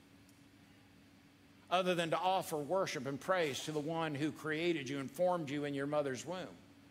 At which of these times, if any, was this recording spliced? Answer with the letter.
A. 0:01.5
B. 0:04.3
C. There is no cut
C